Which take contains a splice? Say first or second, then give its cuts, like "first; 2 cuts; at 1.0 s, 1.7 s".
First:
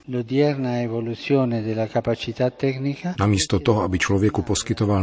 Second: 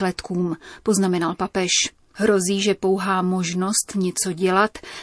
first; 1 cut; at 3.1 s